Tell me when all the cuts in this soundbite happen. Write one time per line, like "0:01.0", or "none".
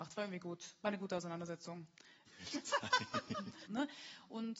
0:02.3
0:03.7